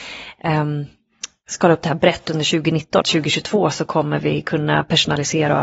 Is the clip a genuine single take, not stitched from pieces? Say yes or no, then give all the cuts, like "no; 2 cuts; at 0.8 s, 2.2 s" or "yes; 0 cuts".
no; 1 cut; at 3.0 s